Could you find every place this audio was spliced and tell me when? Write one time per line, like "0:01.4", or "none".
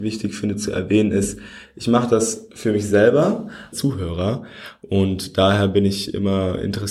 0:03.7